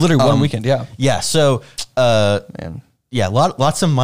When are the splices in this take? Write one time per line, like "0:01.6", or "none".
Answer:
none